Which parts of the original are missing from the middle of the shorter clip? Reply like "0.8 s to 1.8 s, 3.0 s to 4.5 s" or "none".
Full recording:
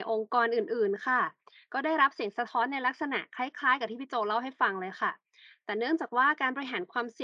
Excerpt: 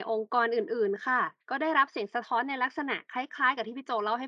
1.4 s to 1.6 s